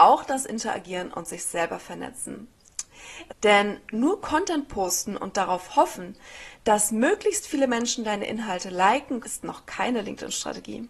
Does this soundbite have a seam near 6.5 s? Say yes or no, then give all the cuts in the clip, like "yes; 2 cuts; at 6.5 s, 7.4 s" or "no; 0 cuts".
no; 2 cuts; at 3.3 s, 9.2 s